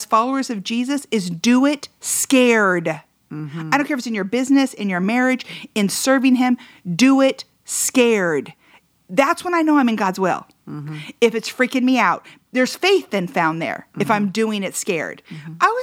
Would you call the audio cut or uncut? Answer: uncut